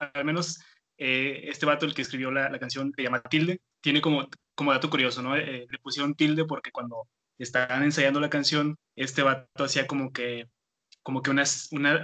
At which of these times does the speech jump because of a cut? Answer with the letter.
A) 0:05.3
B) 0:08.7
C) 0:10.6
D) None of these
B